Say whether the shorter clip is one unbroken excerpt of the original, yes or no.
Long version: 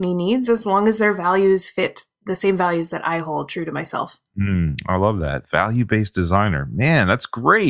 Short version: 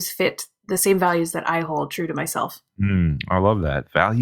yes